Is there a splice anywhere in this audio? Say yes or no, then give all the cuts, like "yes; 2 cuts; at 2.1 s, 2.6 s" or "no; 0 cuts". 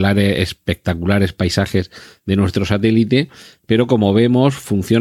no; 0 cuts